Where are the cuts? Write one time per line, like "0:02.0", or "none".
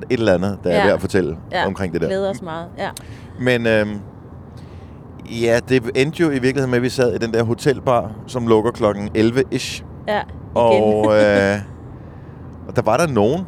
none